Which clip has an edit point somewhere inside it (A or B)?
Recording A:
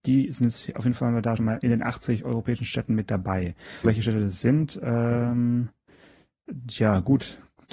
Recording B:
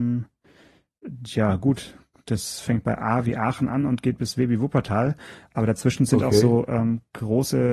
A